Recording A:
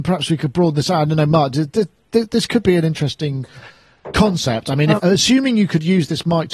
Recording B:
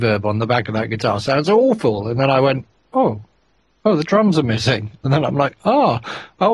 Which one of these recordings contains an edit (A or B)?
A